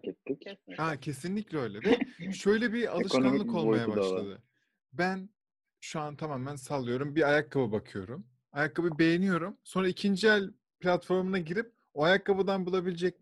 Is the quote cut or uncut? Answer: uncut